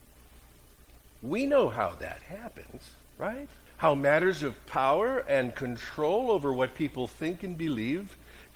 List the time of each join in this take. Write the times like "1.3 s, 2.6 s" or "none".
3.7 s